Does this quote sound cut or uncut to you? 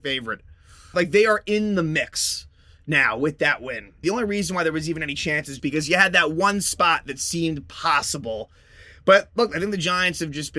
cut